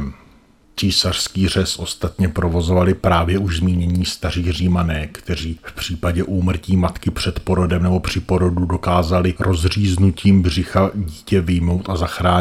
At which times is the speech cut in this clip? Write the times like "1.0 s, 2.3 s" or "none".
none